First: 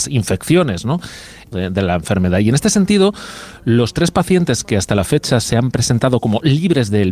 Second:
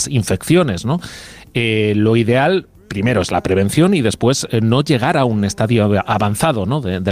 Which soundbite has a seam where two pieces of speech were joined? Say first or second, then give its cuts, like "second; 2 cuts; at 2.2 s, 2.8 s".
first; 1 cut; at 1.5 s